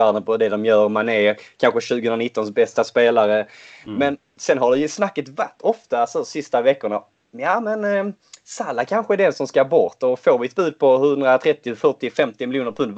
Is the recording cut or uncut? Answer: uncut